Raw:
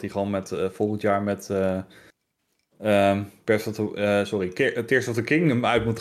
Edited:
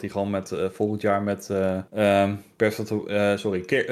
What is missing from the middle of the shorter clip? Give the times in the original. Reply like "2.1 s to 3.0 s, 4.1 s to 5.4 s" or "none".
1.9 s to 2.8 s